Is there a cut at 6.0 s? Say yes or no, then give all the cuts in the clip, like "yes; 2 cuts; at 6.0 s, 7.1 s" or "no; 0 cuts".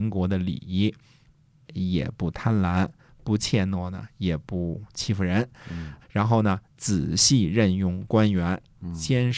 yes; 2 cuts; at 1.6 s, 6.0 s